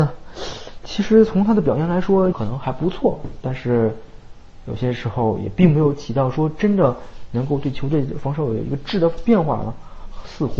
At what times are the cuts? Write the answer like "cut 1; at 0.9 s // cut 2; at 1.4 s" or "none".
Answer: cut 1; at 2.3 s